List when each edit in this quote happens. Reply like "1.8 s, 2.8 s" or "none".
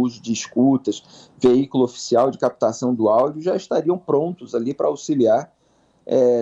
none

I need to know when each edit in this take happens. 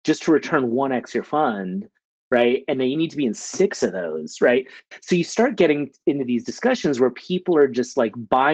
none

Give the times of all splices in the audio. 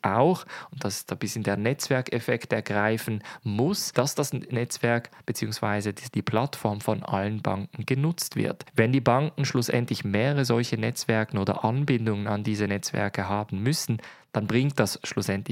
none

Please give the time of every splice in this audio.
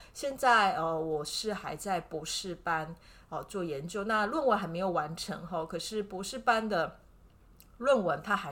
none

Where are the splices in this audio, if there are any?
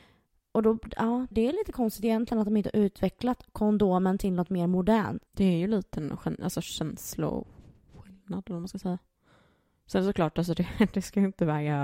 1.3 s, 5.3 s

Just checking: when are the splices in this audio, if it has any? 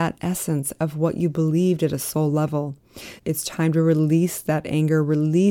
3.2 s

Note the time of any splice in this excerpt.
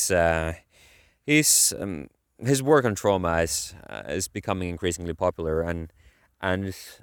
none

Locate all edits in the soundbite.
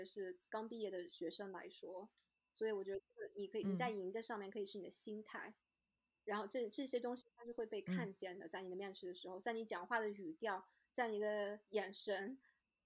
none

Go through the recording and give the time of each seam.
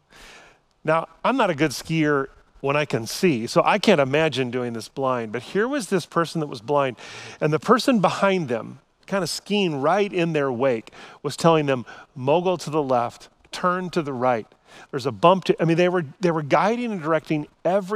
none

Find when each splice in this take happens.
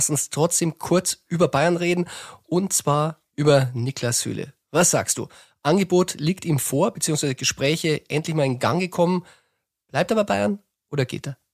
none

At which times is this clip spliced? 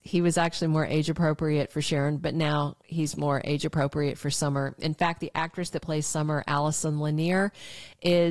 none

